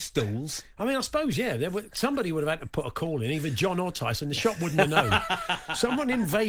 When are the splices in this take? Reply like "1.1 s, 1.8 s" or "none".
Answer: none